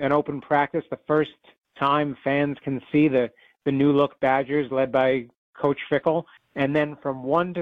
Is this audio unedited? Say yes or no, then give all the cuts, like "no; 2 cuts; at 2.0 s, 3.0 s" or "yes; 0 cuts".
no; 1 cut; at 6.4 s